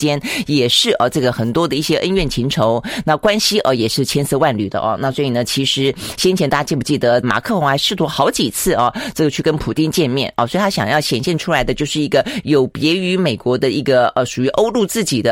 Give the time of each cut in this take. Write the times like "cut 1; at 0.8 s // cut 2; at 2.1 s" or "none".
cut 1; at 7.2 s